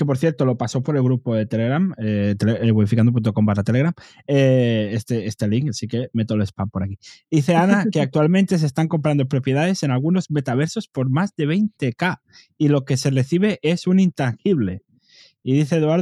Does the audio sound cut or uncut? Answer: uncut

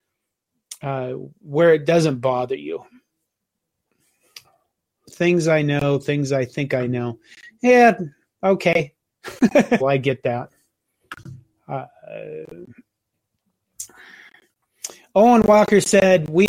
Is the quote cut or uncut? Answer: cut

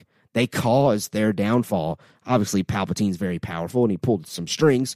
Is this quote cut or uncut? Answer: uncut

